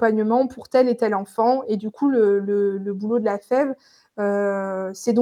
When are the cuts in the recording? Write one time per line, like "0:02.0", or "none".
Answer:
none